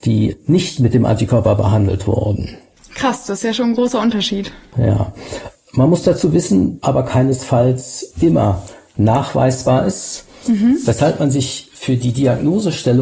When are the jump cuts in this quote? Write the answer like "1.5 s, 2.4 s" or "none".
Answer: 6.8 s